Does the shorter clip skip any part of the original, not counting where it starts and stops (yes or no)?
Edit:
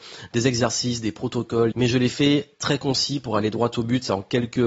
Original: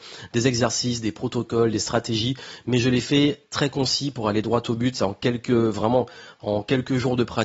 yes